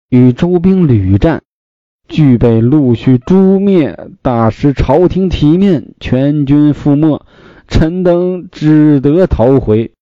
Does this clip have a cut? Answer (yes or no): no